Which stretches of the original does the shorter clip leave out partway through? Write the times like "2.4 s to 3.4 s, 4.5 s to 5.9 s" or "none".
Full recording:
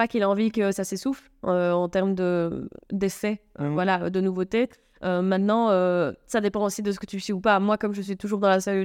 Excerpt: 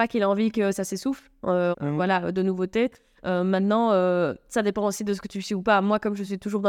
1.7 s to 3.5 s